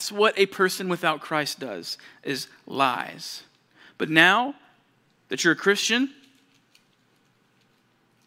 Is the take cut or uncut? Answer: uncut